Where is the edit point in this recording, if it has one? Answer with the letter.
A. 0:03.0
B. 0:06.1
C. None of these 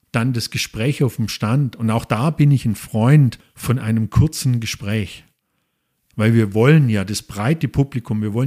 B